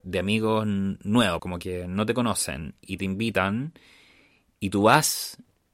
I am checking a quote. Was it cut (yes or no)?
yes